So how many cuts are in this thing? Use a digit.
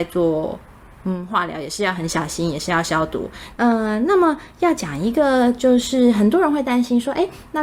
1